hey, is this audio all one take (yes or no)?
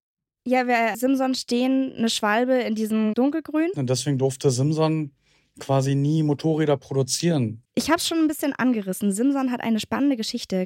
no